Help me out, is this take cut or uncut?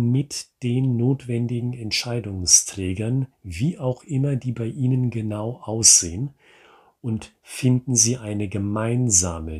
uncut